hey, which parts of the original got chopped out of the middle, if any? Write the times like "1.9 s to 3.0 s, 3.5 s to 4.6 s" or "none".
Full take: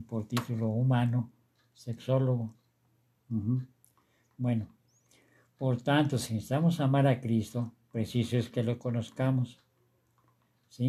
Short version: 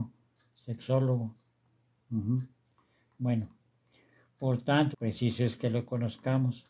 6.1 s to 7.8 s